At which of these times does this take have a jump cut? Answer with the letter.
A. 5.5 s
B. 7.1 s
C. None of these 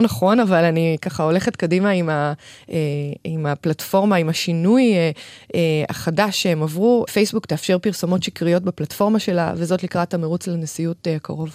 B